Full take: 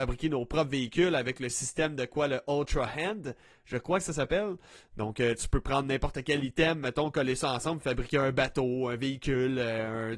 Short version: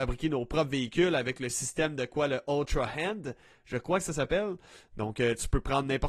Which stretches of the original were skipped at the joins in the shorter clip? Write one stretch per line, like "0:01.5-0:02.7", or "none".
none